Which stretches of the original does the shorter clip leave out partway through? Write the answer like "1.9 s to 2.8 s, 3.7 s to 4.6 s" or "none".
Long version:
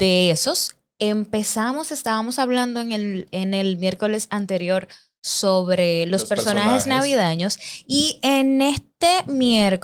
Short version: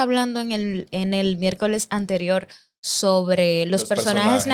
none